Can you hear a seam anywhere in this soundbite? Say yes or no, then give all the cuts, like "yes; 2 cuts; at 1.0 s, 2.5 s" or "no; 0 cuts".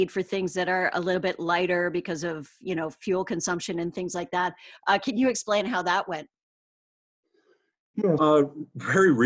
yes; 2 cuts; at 4.8 s, 8.2 s